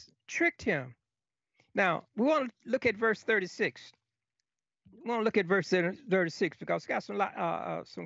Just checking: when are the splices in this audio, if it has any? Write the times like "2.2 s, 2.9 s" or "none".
none